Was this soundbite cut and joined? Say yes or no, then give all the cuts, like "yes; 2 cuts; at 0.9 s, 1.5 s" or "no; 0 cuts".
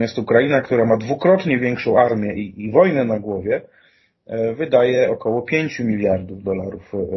no; 0 cuts